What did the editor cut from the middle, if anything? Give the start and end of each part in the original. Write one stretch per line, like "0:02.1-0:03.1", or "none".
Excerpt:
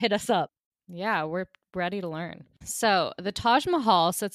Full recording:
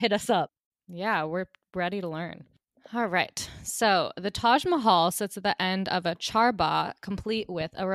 0:02.6-0:03.6